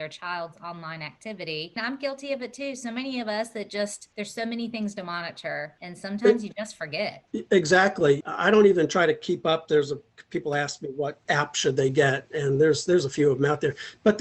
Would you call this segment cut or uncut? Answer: uncut